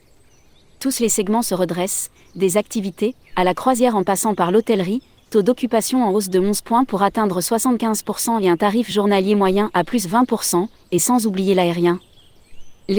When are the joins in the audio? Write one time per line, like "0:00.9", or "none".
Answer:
0:03.2